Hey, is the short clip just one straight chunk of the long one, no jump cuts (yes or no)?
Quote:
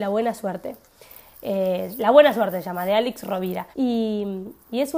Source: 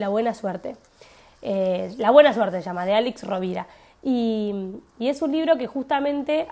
no